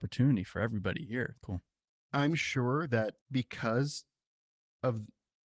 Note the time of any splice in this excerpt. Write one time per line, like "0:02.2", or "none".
0:01.4
0:03.2